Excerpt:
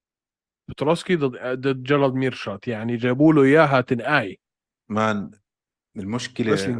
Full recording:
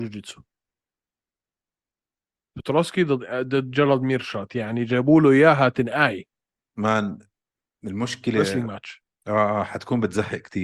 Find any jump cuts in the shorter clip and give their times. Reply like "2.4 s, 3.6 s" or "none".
none